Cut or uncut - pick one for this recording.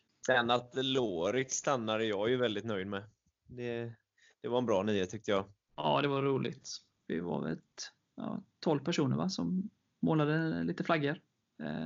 cut